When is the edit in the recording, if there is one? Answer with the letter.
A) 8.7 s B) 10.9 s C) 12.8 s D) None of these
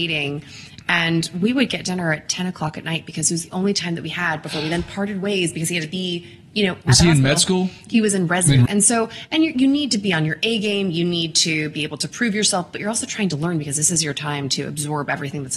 A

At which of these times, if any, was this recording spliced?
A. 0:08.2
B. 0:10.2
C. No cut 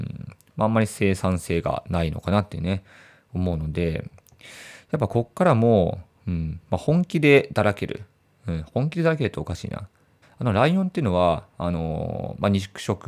B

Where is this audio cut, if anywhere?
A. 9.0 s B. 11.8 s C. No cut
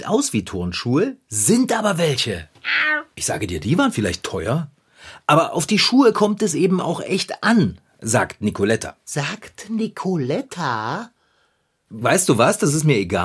B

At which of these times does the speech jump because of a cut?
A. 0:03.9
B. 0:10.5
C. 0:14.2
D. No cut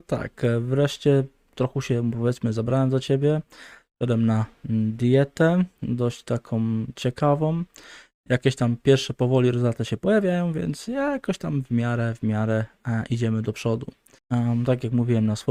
C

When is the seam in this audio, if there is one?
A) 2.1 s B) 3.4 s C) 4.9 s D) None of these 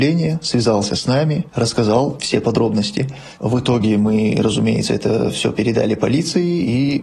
D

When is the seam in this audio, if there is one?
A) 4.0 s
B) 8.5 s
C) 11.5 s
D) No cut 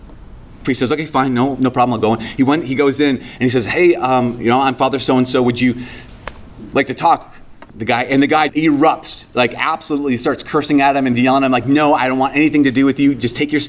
B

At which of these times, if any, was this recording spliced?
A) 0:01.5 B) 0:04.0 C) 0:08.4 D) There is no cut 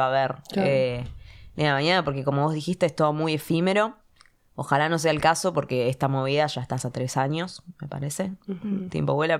D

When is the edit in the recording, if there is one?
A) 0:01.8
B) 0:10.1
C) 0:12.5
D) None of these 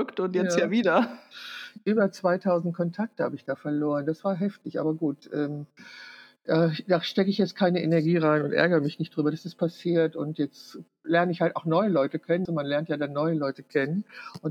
C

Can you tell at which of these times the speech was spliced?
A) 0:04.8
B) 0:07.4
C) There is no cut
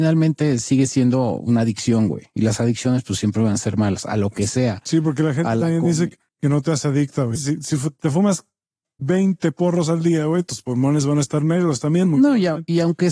B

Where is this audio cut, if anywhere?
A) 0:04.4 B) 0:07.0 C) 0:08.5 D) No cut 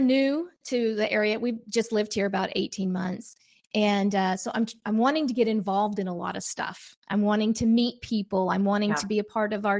D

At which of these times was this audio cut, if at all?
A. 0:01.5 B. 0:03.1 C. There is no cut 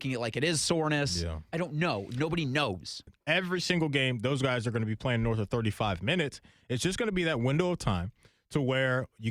B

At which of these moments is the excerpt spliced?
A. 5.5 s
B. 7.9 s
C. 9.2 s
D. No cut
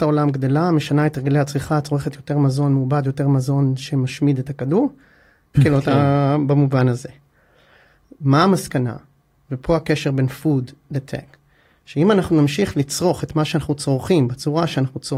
A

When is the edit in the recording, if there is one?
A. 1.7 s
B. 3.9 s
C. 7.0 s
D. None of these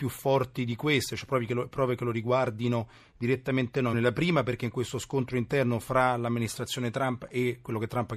B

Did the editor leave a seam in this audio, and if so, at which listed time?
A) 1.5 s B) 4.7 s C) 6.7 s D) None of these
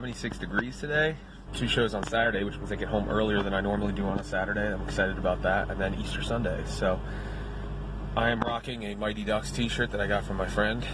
A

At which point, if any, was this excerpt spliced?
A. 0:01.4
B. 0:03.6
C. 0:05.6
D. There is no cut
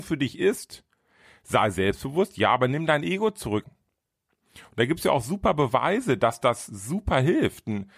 B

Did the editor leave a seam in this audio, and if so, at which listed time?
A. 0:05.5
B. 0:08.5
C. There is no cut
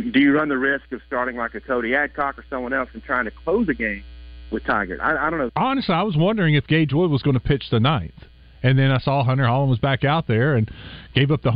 A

